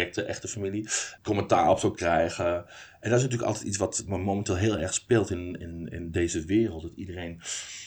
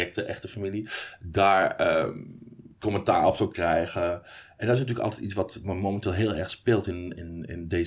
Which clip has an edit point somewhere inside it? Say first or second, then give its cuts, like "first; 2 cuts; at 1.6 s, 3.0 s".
first; 1 cut; at 1.2 s